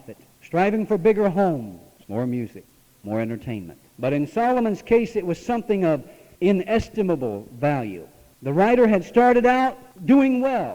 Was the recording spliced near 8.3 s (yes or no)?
no